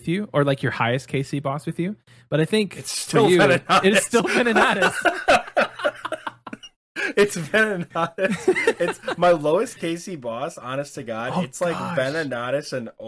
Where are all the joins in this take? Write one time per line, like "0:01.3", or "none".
none